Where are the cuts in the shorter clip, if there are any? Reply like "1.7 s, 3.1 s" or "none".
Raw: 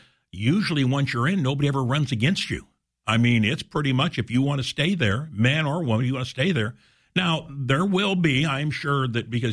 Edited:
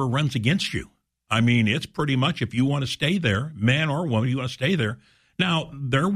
none